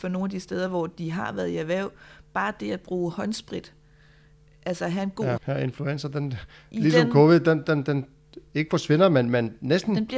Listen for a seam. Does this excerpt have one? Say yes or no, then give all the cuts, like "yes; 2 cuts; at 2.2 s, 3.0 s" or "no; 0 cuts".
yes; 1 cut; at 5.4 s